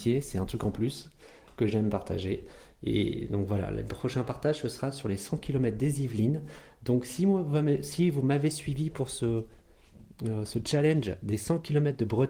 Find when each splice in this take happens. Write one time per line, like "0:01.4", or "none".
none